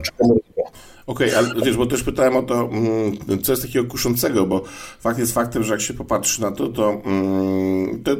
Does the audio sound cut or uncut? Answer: uncut